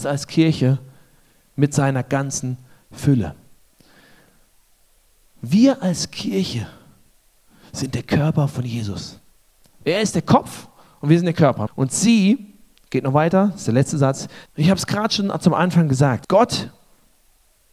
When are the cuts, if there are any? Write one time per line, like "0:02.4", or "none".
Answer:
0:11.7
0:14.5
0:16.2